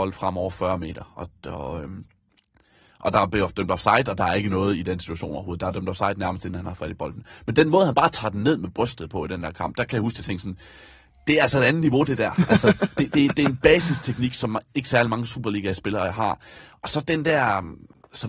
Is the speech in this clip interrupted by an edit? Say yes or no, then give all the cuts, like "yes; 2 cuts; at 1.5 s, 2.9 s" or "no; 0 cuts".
no; 0 cuts